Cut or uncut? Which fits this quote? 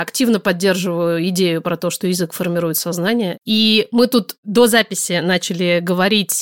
cut